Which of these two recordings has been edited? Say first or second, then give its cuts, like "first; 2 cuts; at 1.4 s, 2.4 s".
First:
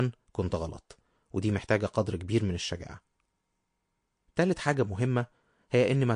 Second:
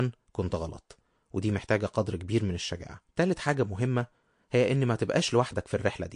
second; 1 cut; at 3.1 s